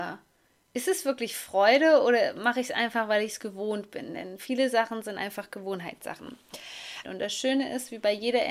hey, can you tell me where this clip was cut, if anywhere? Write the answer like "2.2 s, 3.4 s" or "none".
7.0 s